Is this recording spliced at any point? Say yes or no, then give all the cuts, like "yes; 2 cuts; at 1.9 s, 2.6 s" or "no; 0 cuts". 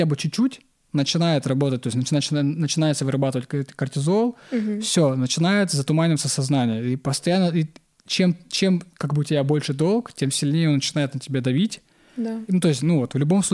yes; 1 cut; at 12.5 s